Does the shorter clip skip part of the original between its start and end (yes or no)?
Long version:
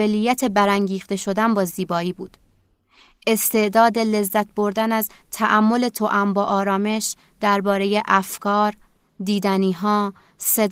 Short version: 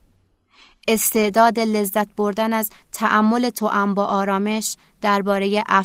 no